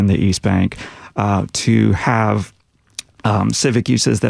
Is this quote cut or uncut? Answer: uncut